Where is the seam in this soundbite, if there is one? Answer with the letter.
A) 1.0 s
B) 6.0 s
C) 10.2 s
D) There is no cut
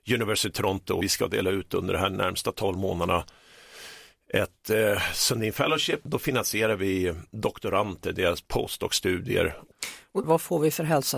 C